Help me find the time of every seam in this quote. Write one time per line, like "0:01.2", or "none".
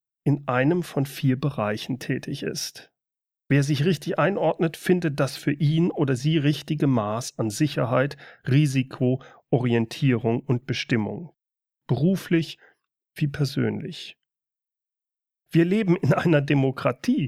0:03.4
0:15.5